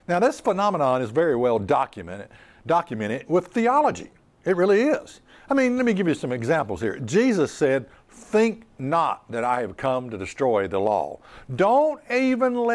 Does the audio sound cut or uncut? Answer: uncut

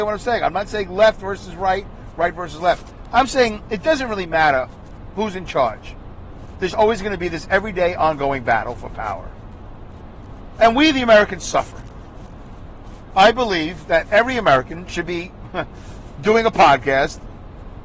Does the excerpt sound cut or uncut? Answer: cut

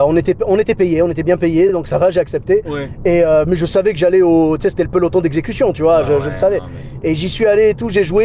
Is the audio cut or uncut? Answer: uncut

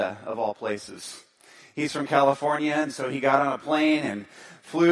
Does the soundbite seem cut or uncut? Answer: uncut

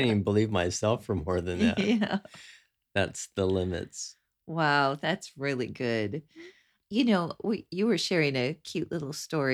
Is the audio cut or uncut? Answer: uncut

